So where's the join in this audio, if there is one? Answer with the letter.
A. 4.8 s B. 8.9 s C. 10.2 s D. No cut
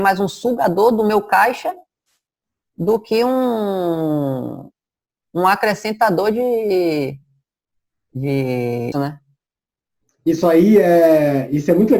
B